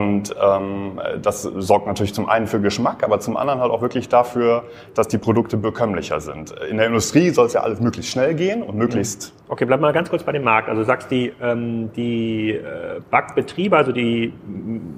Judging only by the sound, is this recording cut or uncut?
cut